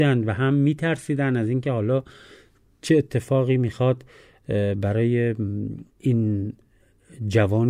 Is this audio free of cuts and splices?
no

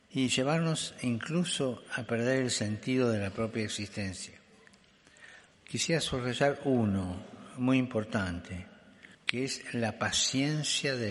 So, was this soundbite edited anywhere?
yes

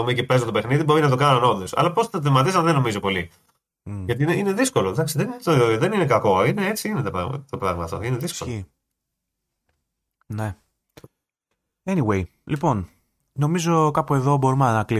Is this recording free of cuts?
yes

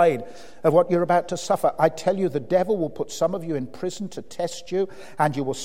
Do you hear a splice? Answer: no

